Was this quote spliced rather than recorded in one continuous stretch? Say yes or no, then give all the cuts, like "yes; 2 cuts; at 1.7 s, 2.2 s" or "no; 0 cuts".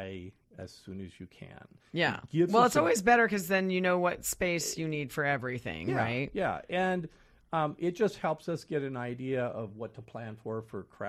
no; 0 cuts